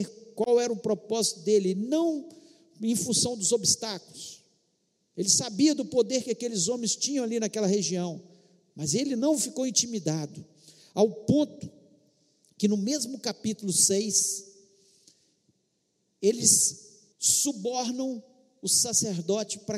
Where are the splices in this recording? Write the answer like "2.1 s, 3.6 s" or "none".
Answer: 17.1 s